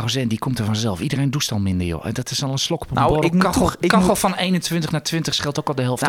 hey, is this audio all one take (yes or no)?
yes